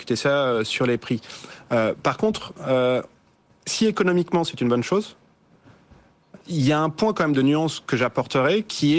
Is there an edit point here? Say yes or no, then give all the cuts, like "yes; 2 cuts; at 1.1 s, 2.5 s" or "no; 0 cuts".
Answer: yes; 1 cut; at 6.4 s